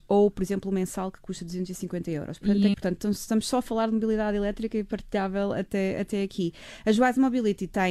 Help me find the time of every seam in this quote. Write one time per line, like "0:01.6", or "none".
0:02.7